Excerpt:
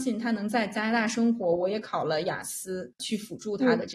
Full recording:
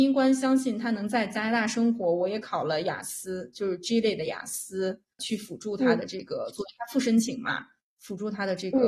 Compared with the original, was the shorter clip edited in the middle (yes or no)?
yes